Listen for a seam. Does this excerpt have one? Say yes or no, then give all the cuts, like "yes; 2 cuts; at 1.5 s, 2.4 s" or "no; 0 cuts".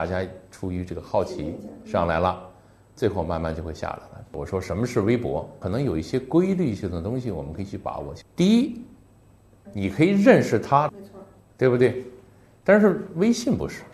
yes; 3 cuts; at 5.6 s, 9.6 s, 10.9 s